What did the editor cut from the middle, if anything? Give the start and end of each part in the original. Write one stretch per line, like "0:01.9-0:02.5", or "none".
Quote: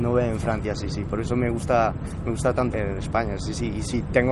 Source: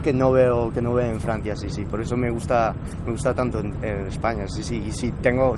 0:03.5-0:03.8